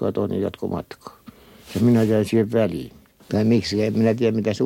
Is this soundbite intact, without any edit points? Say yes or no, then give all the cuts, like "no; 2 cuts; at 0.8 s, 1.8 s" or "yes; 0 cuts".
no; 1 cut; at 3.2 s